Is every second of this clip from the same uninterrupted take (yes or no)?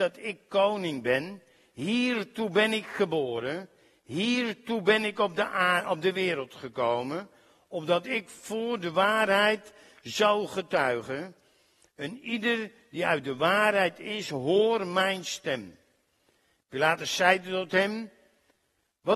yes